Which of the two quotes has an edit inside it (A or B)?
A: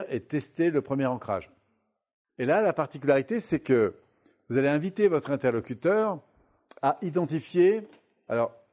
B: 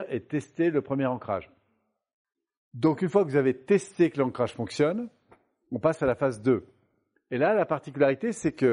A